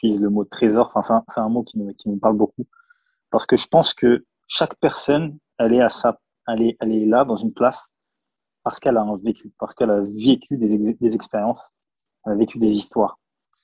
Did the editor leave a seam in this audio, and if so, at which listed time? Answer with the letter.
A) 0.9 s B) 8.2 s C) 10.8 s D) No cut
D